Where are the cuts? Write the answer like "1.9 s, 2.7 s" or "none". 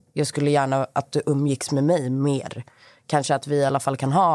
none